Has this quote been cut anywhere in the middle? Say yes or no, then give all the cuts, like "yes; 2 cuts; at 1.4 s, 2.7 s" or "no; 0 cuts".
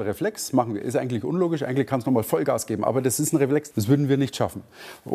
yes; 1 cut; at 3.7 s